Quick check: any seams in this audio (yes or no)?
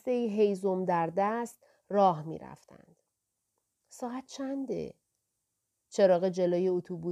no